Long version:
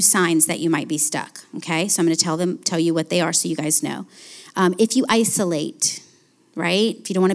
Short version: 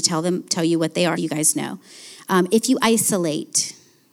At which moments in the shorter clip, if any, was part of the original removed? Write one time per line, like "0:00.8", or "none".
0:01.2